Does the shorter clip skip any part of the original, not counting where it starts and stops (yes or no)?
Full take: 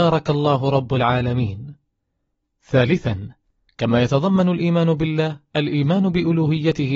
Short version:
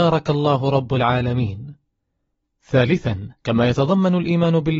yes